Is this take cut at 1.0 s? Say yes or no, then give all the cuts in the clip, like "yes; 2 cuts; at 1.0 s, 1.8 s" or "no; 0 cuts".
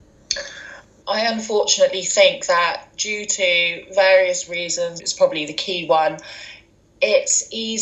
yes; 2 cuts; at 1.0 s, 5.0 s